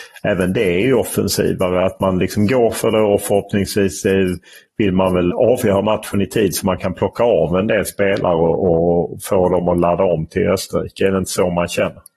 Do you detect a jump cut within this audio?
yes; 1 cut; at 5.3 s

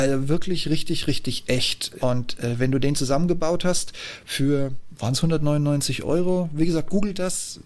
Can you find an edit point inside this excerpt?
yes; 1 cut; at 2.0 s

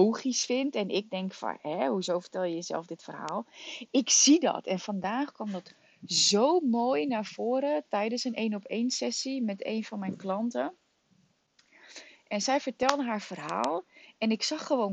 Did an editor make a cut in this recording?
no; 0 cuts

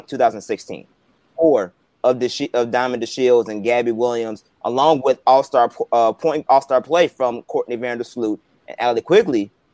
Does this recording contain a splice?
yes; 2 cuts; at 1.4 s, 6.5 s

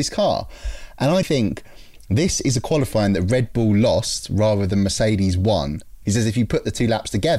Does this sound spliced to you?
yes; 2 cuts; at 1.2 s, 6.0 s

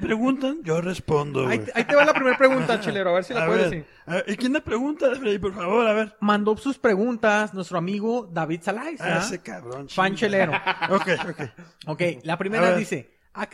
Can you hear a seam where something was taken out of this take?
no; 0 cuts

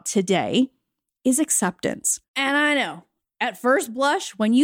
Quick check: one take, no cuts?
no; 1 cut; at 2.3 s

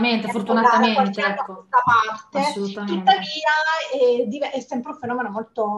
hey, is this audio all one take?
yes; 0 cuts

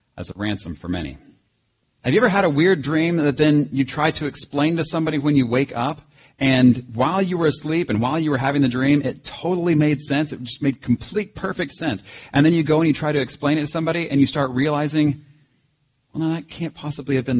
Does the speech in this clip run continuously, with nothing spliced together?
no; 1 cut; at 1.8 s

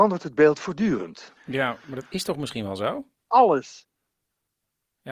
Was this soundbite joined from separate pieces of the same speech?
yes; 2 cuts; at 1.4 s, 3.3 s

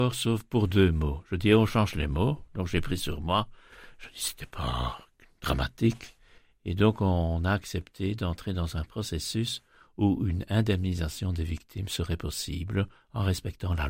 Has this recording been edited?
no; 0 cuts

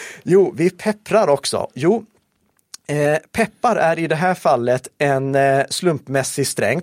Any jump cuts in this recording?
yes; 1 cut; at 1.7 s

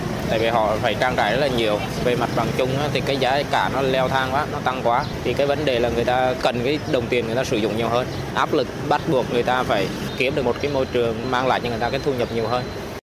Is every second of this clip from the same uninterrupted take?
yes; 0 cuts

